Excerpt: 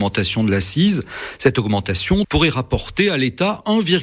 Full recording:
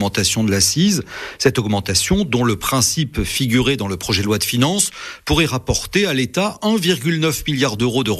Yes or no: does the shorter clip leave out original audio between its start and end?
yes